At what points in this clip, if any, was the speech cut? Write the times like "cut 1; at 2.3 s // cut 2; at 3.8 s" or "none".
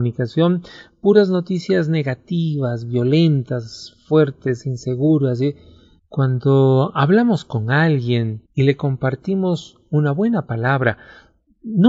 cut 1; at 6.0 s // cut 2; at 8.4 s